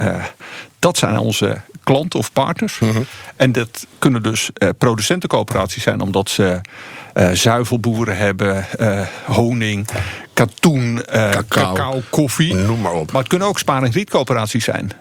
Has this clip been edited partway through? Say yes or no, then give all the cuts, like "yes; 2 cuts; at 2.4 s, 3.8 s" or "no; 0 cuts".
no; 0 cuts